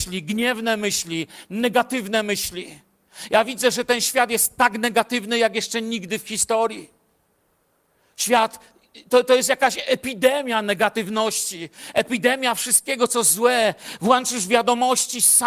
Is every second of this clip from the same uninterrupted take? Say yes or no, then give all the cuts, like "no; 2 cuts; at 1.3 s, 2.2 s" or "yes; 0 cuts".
yes; 0 cuts